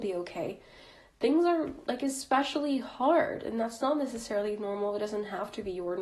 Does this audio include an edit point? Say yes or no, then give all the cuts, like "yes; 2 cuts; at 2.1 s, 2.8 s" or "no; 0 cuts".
no; 0 cuts